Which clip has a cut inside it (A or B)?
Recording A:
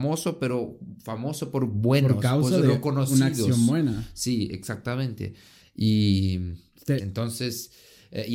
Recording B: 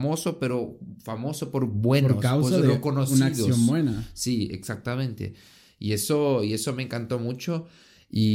A